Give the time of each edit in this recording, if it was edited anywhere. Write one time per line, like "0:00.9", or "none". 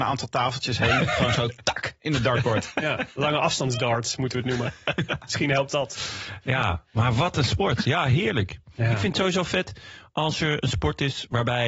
none